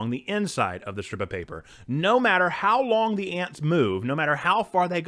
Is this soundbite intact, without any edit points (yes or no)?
yes